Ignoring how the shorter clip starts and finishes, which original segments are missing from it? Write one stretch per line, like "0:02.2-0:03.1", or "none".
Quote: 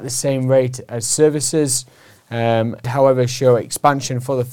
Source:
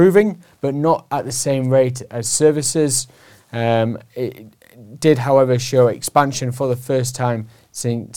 0:04.1-0:05.2